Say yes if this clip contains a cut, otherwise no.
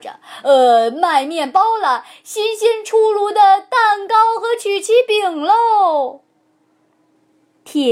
no